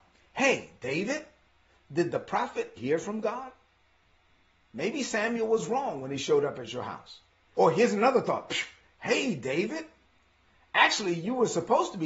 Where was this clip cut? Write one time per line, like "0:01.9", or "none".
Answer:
0:02.8
0:07.5

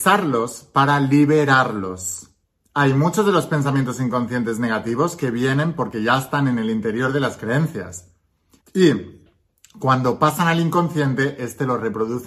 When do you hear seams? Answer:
0:08.6

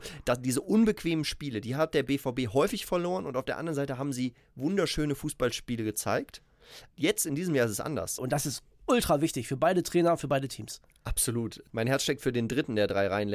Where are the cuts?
0:08.2
0:11.7

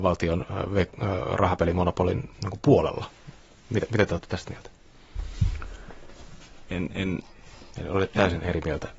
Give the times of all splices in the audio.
0:06.7

